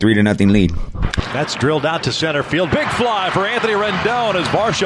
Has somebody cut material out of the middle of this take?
yes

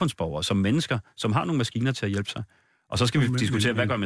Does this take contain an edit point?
no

